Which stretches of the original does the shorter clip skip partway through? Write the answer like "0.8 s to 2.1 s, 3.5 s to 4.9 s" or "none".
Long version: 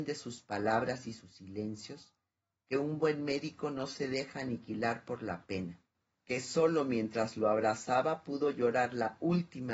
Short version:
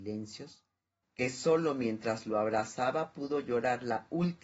2.5 s to 6.1 s